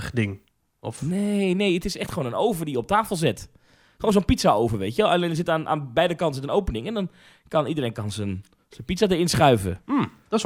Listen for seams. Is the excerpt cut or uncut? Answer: uncut